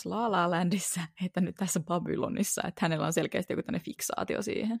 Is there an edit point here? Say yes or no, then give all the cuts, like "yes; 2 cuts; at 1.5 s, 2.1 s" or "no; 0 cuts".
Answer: no; 0 cuts